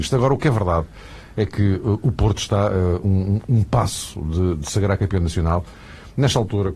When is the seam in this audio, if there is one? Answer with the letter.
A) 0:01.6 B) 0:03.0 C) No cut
C